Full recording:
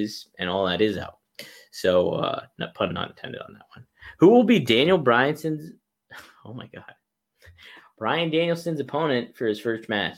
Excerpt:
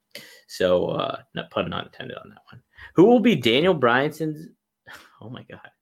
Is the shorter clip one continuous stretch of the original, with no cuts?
yes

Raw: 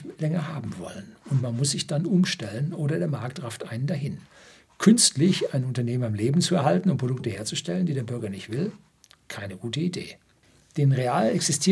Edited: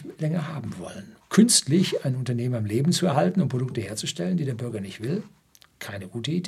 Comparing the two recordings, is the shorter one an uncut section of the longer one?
no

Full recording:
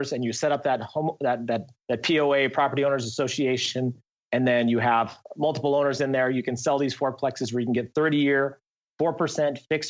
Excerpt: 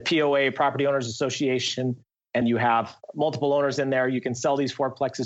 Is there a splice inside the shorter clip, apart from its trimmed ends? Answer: yes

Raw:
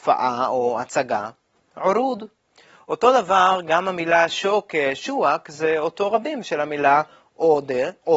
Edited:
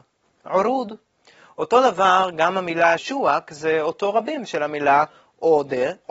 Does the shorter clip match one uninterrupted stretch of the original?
no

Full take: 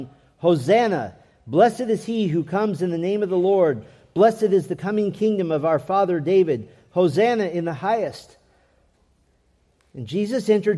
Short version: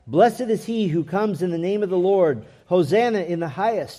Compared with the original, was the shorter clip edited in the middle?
yes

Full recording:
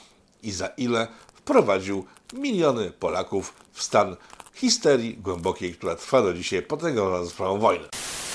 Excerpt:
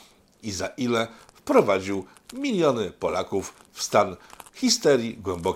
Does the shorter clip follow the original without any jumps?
yes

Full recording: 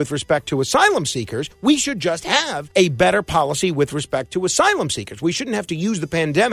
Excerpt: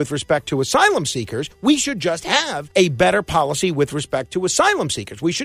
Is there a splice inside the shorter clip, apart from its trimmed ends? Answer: no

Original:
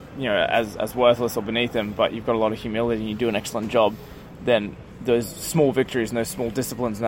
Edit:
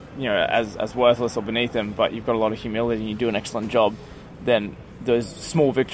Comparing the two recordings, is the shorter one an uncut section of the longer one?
yes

